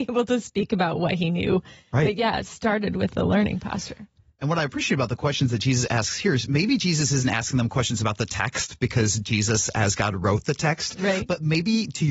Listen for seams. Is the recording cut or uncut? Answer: uncut